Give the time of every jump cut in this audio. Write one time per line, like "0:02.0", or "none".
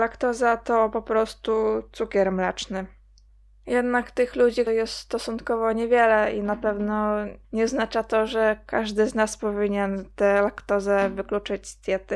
0:04.7
0:07.4